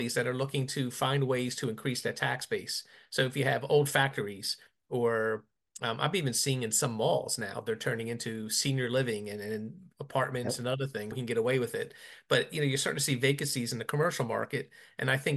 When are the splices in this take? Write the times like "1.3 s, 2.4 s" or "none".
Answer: 11.1 s